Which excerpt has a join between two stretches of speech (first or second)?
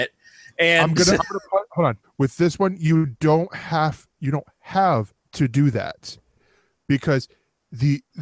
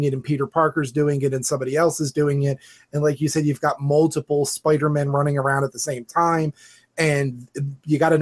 first